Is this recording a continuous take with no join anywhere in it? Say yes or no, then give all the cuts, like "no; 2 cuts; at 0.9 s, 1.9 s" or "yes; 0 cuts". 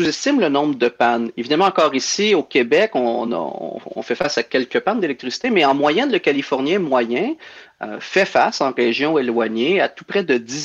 yes; 0 cuts